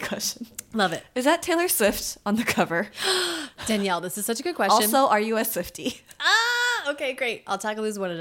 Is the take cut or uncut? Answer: uncut